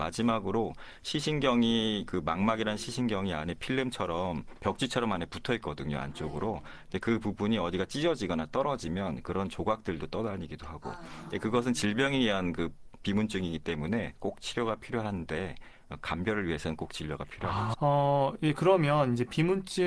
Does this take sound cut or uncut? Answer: cut